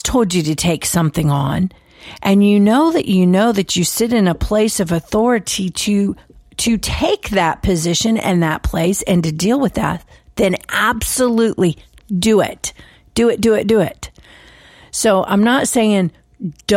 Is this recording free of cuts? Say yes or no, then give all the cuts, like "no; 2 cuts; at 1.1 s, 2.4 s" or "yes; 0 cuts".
yes; 0 cuts